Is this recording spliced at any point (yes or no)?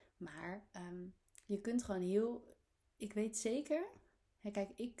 no